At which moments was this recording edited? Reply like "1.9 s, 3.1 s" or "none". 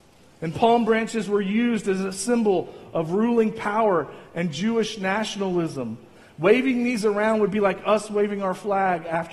none